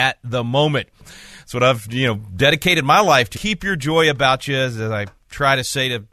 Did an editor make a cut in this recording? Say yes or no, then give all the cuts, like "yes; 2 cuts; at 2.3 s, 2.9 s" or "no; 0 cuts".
yes; 2 cuts; at 1.0 s, 3.3 s